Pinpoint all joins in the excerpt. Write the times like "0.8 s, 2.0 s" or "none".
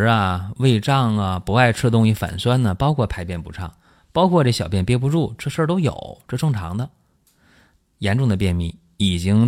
7.8 s